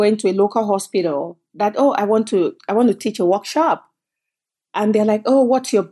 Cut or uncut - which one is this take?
uncut